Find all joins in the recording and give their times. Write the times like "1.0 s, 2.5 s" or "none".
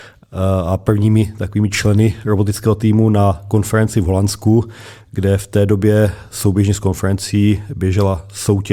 none